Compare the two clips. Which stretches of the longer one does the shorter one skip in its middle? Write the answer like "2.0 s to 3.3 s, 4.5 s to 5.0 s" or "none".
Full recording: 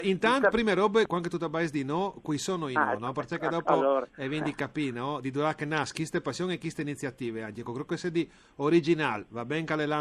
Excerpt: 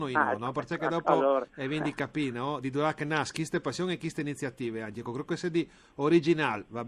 none